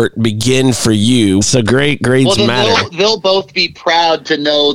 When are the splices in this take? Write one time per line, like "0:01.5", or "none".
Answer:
0:01.4